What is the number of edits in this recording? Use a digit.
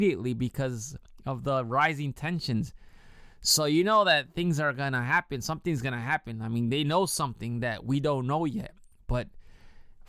0